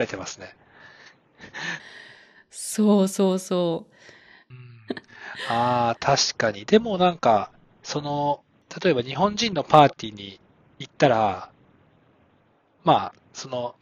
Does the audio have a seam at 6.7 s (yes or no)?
no